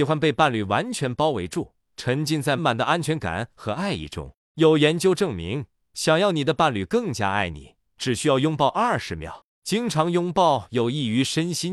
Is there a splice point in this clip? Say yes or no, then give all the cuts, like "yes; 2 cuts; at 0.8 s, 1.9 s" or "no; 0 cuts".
yes; 1 cut; at 2.6 s